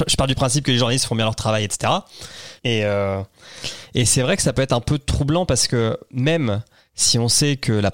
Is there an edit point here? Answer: yes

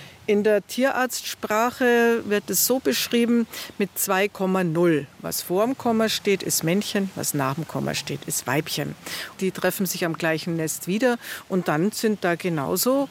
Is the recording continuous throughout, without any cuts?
no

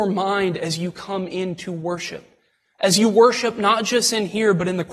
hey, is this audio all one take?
yes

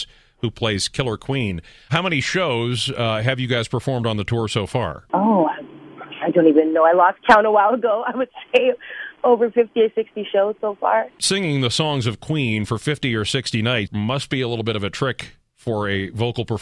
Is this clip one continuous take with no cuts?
no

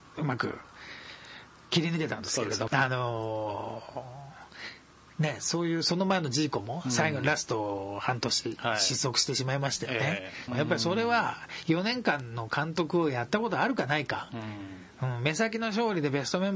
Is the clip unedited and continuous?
no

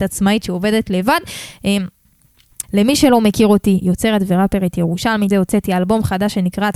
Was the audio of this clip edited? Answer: yes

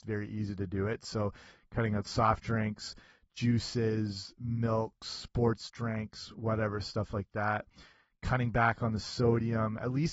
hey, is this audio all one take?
yes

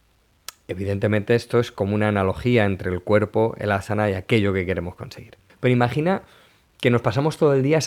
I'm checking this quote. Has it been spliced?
yes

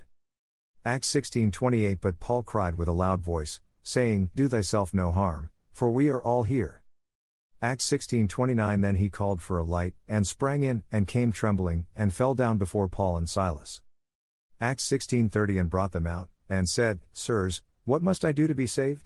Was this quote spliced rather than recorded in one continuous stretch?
no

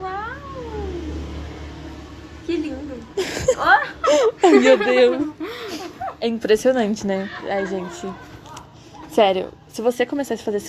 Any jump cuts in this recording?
no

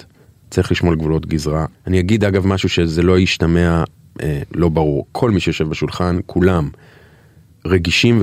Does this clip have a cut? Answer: no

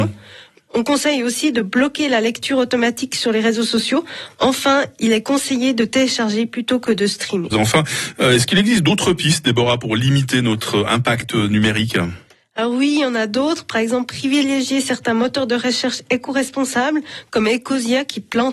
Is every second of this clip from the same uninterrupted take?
no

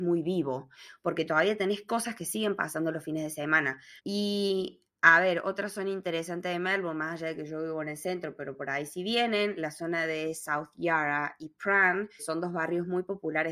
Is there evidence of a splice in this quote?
yes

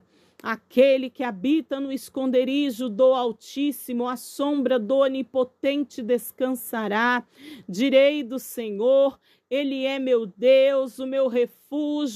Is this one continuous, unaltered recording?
yes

